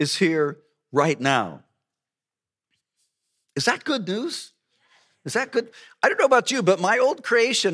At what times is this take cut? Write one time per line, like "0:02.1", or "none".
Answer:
none